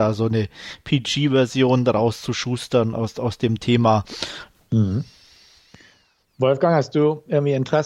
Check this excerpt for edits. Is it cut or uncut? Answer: cut